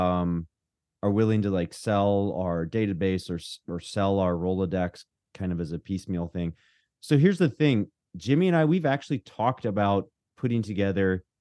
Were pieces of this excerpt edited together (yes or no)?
no